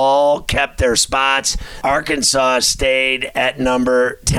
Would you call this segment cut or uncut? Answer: cut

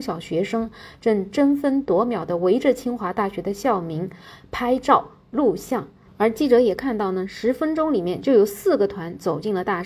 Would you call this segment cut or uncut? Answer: cut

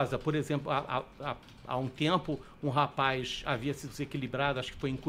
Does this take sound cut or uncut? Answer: uncut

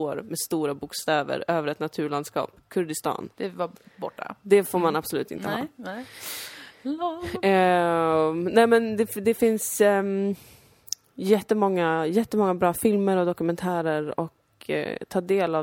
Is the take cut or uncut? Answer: cut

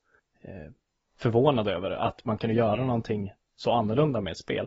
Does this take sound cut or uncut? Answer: uncut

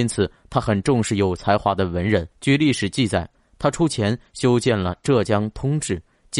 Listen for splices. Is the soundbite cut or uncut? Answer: cut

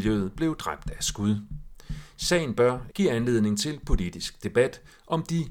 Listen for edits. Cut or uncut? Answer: cut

